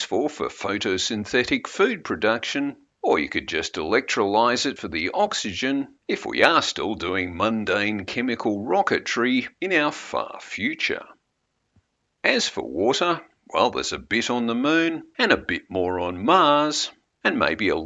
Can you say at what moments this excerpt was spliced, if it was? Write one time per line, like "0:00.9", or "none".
0:06.0